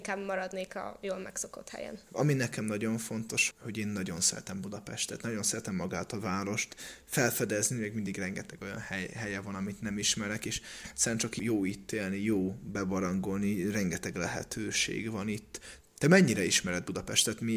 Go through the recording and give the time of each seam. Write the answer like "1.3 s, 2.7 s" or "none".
2.0 s, 3.5 s